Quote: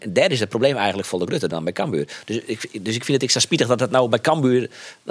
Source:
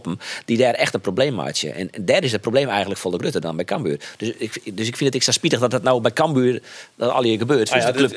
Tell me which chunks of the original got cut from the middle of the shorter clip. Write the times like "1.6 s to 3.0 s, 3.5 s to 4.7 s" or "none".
none